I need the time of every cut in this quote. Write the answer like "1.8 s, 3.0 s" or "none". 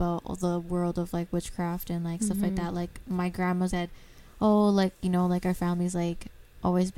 3.7 s